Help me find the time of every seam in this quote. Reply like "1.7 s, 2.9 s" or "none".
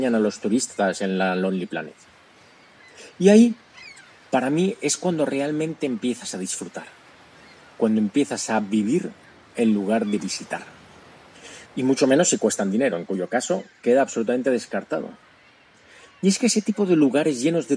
11.6 s